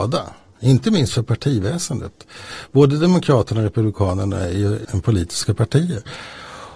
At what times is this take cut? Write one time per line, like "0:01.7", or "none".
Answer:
0:04.8

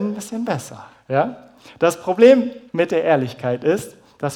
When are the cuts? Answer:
0:00.9
0:02.7

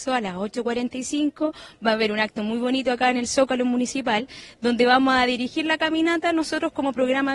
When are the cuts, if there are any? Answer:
none

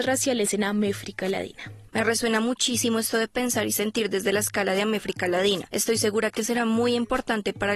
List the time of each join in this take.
0:01.9

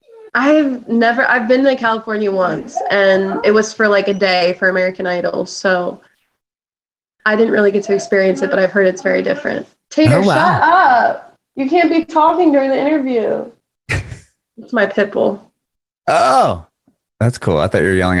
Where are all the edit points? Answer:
none

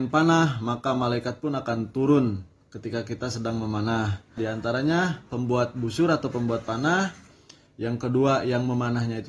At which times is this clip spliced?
0:04.4

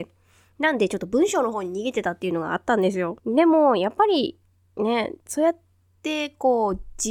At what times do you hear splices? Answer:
0:03.2
0:05.2

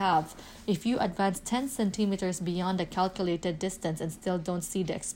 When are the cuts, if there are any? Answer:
none

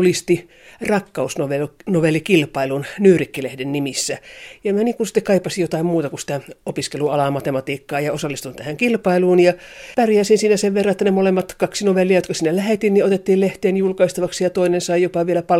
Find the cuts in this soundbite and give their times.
none

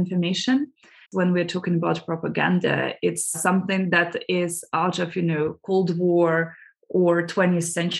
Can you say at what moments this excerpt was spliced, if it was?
0:01.0
0:03.3

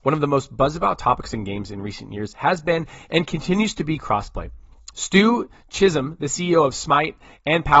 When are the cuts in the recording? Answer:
0:04.9

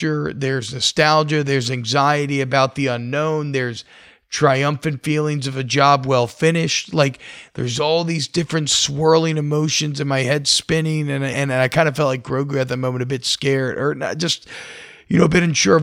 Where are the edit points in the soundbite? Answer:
0:11.3

